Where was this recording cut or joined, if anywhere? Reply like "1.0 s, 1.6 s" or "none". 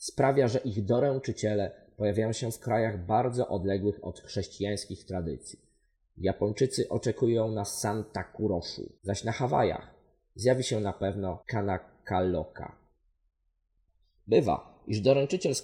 6.0 s, 9.0 s, 11.4 s